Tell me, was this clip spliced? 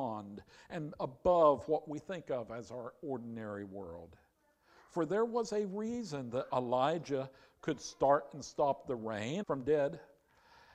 yes; 1 cut; at 9.4 s

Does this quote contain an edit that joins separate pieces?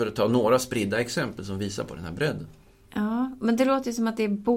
no; 0 cuts

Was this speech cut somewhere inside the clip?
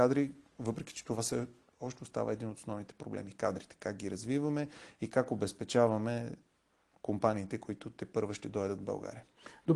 no; 0 cuts

